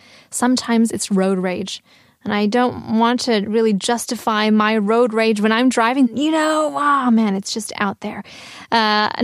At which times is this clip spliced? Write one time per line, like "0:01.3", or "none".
0:06.1

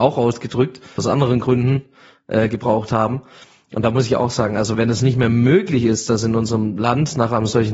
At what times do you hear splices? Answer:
0:01.0
0:04.7

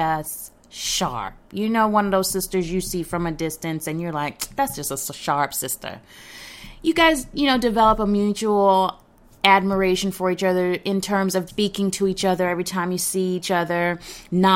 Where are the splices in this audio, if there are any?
0:11.5

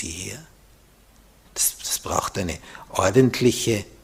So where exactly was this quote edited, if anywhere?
0:01.4

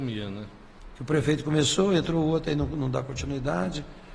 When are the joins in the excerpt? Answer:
0:01.0

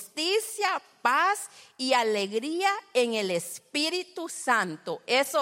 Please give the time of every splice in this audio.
none

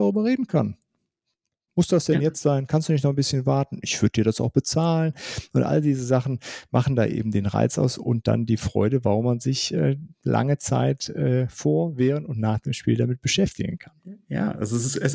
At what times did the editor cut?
none

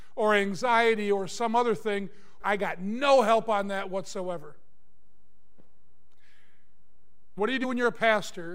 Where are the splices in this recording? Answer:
0:02.4
0:07.4

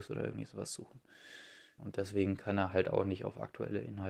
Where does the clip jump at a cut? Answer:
0:01.8

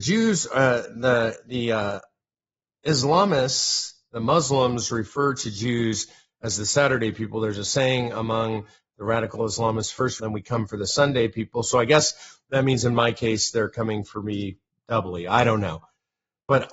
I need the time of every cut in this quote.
0:10.2

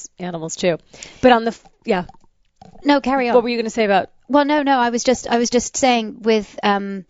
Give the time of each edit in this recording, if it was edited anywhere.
none

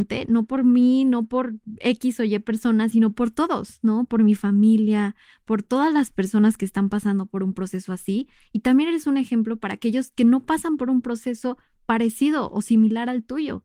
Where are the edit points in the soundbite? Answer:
none

